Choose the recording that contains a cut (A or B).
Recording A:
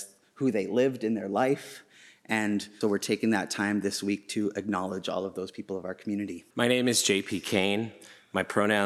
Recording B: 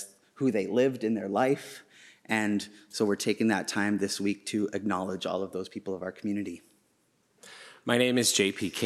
A